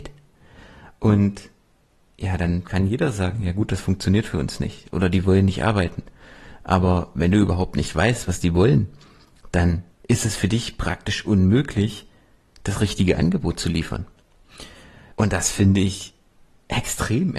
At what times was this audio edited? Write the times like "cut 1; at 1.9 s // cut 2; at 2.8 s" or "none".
cut 1; at 15.1 s